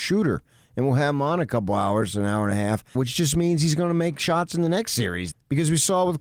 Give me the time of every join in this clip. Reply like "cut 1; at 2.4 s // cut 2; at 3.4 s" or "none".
cut 1; at 2.9 s // cut 2; at 5.3 s